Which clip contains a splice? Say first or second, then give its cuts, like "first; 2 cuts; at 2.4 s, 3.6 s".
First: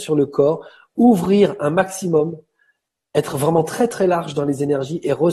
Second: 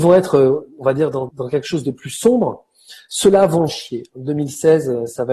second; 2 cuts; at 1.3 s, 3.7 s